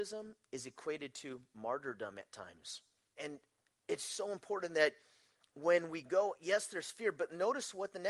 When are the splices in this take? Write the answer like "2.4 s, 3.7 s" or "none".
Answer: 3.2 s